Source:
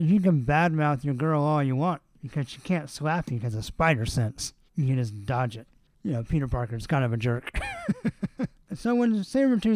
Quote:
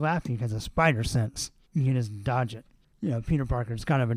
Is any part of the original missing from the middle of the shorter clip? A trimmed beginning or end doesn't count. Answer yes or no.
no